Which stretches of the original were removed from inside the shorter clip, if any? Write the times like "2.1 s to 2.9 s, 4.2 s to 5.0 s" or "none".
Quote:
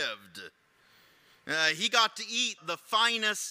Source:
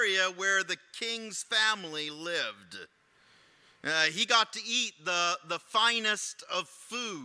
4.9 s to 5.4 s